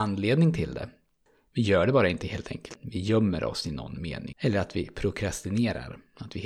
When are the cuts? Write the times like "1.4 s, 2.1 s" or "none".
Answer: 2.7 s, 4.3 s